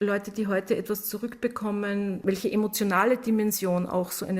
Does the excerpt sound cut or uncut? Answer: cut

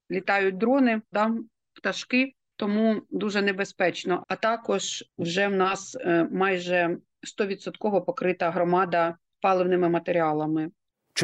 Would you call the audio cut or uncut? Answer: cut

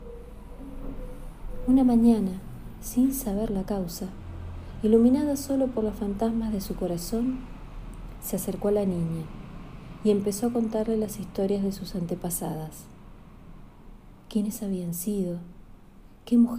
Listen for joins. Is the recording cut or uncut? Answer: uncut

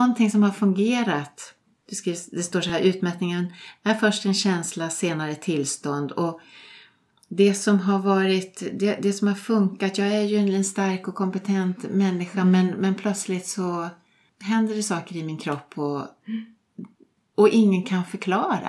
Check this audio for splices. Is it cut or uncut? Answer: uncut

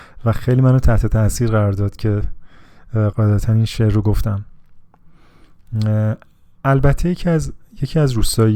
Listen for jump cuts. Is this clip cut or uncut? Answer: cut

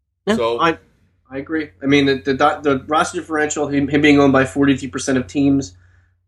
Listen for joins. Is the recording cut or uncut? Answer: uncut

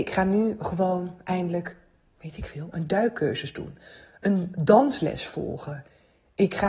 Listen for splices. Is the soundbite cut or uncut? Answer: uncut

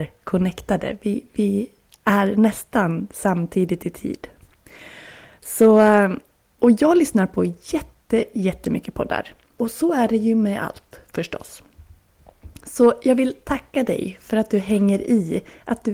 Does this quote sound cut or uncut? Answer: cut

